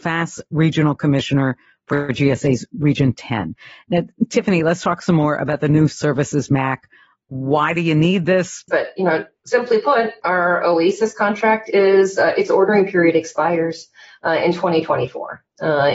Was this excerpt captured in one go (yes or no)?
no